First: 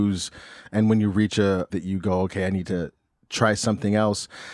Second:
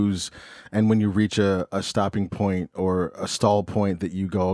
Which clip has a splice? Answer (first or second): first